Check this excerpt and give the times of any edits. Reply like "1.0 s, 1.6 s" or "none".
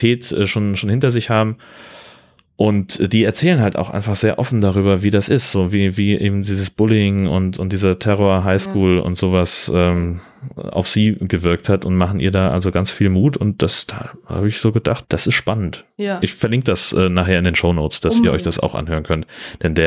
15.0 s